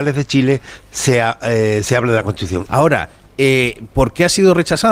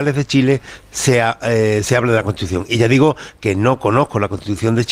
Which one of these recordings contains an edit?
first; 1 cut; at 2.7 s

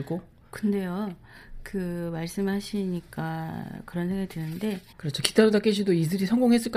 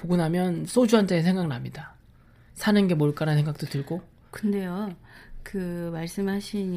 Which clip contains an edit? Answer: first; 1 cut; at 4.9 s

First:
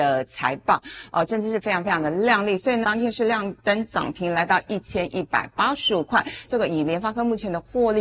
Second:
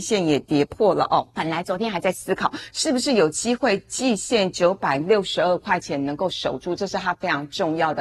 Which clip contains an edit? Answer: first; 2 cuts; at 2.8 s, 6.5 s

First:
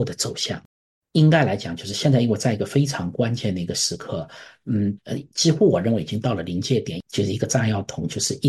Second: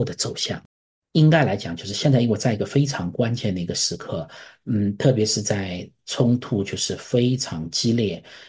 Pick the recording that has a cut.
first; 1 cut; at 5.0 s

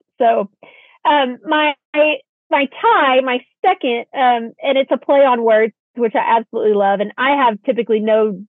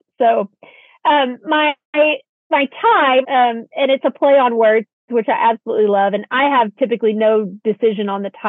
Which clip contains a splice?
second; 1 cut; at 3.2 s

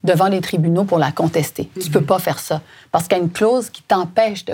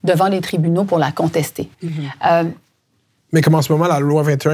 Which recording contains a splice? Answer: second; 1 cut; at 1.7 s

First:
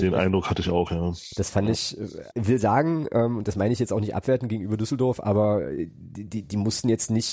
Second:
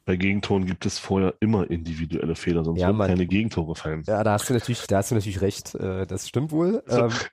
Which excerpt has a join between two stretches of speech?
first; 1 cut; at 2.3 s

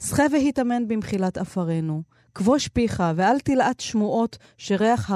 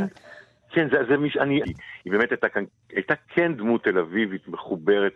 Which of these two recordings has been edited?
second; 1 cut; at 1.6 s

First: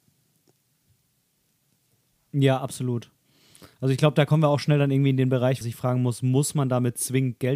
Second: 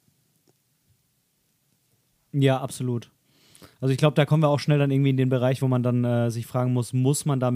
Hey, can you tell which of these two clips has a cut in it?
first; 1 cut; at 5.6 s

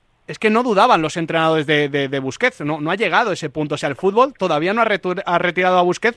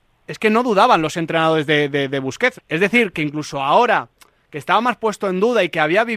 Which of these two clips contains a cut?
second; 1 cut; at 2.6 s

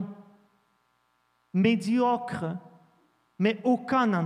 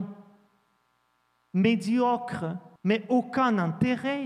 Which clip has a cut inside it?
second; 1 cut; at 2.8 s

